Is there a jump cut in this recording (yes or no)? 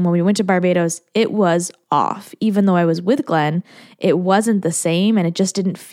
no